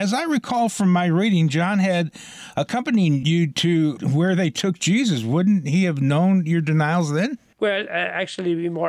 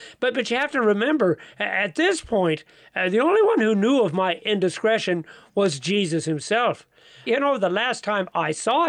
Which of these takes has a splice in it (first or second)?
second